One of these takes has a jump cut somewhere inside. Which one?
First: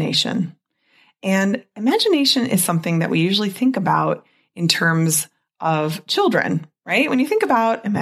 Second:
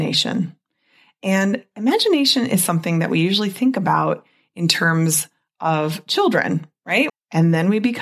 second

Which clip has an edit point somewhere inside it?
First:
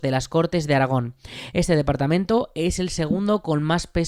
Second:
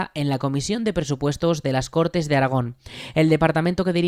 first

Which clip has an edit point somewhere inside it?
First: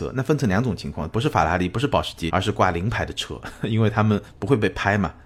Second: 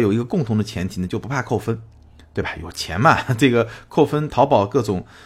first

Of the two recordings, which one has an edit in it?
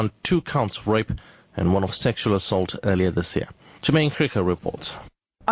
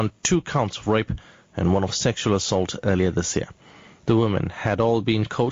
first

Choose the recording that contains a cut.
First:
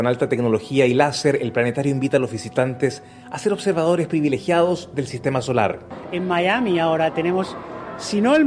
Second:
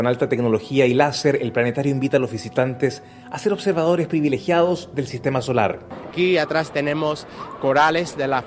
second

